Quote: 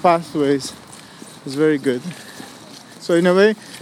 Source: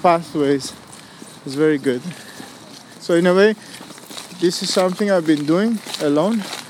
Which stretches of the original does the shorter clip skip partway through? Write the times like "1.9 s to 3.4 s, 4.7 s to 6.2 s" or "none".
none